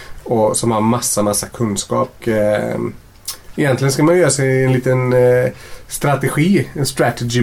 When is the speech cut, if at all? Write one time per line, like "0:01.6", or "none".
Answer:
0:02.2